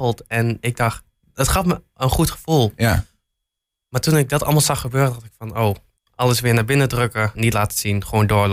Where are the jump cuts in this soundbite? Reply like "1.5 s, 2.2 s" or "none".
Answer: 6.0 s, 7.3 s